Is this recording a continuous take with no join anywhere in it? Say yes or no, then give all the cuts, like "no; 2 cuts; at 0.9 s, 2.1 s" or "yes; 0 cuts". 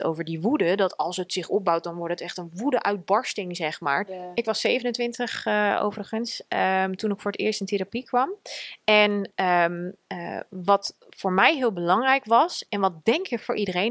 no; 1 cut; at 4.1 s